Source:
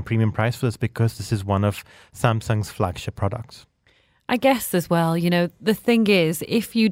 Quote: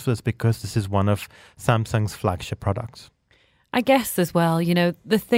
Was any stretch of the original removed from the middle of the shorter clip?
no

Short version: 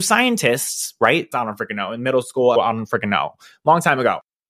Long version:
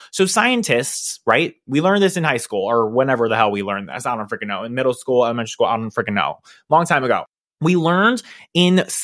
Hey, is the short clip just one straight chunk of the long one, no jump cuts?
no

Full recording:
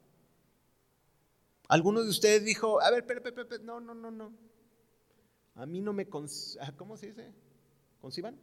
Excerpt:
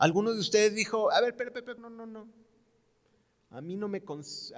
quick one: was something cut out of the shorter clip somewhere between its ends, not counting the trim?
yes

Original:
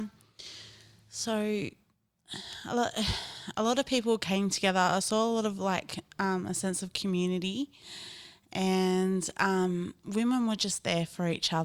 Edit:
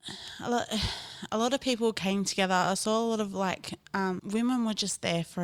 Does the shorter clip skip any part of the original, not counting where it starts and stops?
yes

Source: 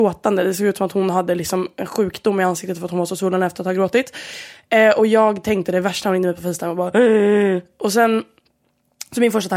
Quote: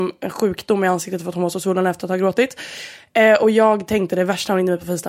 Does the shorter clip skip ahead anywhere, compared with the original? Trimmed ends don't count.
no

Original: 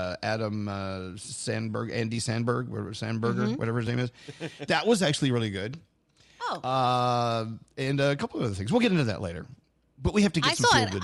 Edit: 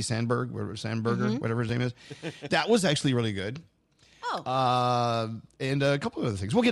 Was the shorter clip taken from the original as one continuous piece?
yes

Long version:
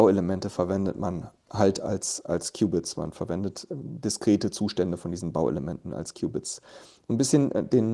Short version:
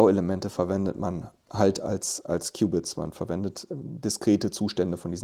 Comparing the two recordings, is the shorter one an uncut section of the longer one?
yes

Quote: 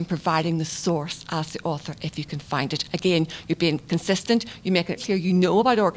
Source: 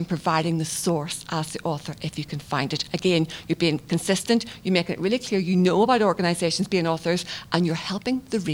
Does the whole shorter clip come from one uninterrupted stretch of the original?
no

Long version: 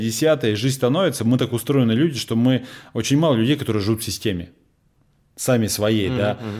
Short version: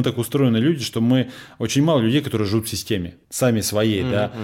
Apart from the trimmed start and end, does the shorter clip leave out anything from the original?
yes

